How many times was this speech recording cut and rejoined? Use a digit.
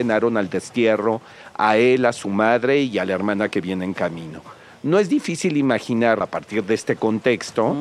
1